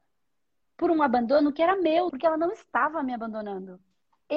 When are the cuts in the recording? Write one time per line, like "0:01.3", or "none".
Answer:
0:02.1